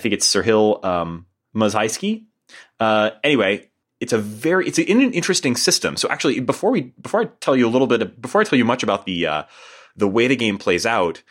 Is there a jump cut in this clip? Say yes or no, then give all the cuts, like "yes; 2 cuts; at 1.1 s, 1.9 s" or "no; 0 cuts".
no; 0 cuts